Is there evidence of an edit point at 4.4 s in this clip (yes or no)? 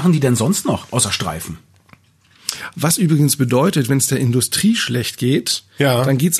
no